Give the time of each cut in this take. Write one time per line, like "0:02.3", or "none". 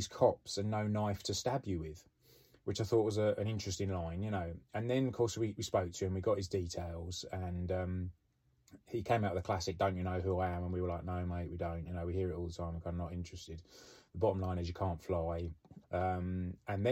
0:15.8